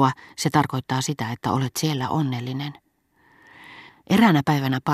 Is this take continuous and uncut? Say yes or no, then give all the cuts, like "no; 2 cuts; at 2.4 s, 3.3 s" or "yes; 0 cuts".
no; 1 cut; at 3.9 s